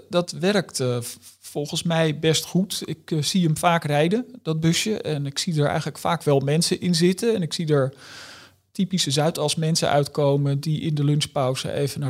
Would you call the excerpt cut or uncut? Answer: uncut